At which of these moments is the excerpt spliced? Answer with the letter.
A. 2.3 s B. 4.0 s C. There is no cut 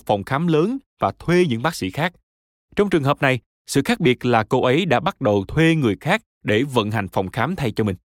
C